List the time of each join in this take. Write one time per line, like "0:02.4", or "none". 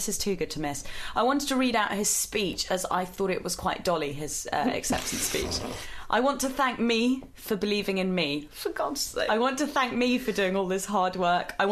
none